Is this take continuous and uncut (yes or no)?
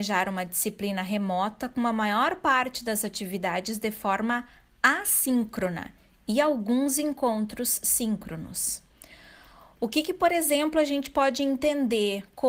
yes